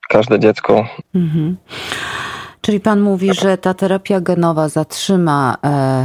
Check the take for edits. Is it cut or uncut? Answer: cut